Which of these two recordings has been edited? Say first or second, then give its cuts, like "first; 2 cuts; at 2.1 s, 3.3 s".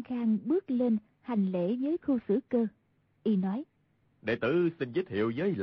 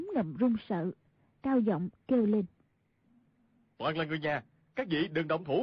first; 1 cut; at 4.0 s